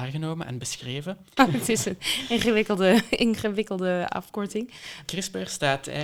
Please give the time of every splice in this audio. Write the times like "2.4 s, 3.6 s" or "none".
1.4 s, 5.0 s